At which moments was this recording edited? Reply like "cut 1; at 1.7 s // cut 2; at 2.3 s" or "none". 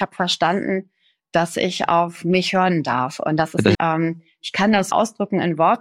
cut 1; at 3.7 s // cut 2; at 4.9 s